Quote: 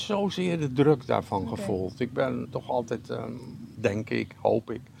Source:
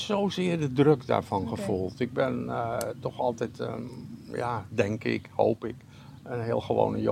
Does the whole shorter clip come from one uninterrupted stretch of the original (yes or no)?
no